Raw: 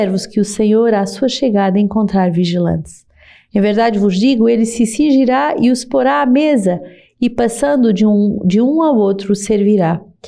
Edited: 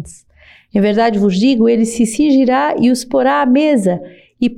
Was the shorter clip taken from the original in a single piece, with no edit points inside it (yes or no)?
yes